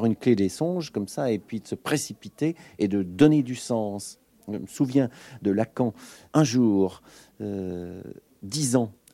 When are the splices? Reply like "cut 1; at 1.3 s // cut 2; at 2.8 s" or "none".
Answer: cut 1; at 4.4 s // cut 2; at 6.3 s